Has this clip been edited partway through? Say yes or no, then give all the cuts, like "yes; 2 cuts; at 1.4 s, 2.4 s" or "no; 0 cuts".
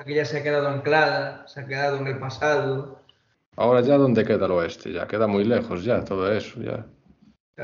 yes; 1 cut; at 3.3 s